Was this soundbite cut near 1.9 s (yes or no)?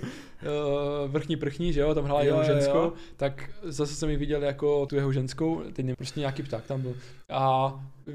no